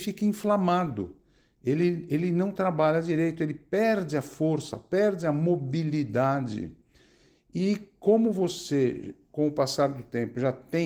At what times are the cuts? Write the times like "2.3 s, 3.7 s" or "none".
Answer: none

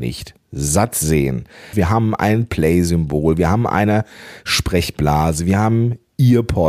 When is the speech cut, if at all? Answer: 1.7 s

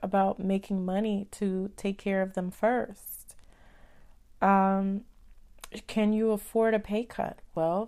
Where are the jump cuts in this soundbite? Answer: none

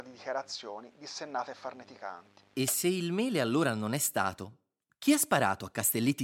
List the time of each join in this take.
none

